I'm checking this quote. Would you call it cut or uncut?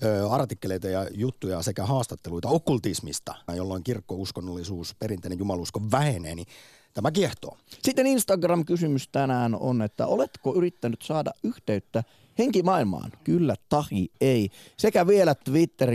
cut